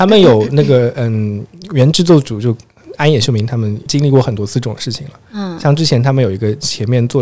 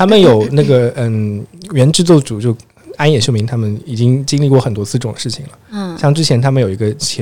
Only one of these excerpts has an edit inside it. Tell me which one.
first; 1 cut; at 3.9 s

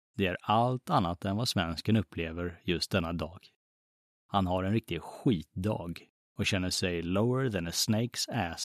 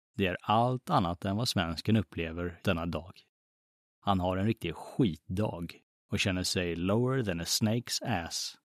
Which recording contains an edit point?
second; 1 cut; at 2.6 s

